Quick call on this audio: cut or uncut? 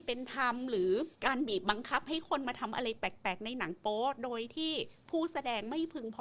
cut